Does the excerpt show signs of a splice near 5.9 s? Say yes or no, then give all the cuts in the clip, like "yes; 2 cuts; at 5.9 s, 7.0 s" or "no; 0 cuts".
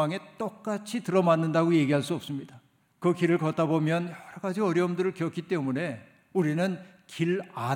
no; 1 cut; at 2.8 s